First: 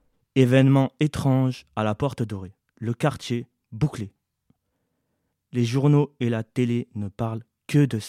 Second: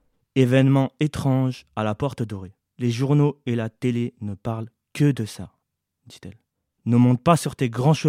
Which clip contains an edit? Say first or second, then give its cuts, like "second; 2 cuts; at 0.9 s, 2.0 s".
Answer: second; 2 cuts; at 2.6 s, 6.8 s